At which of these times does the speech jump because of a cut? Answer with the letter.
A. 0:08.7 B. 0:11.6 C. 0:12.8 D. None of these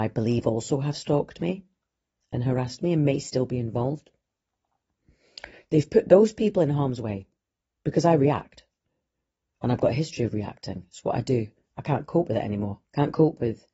C